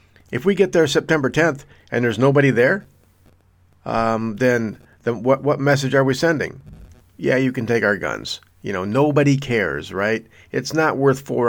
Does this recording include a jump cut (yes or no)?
no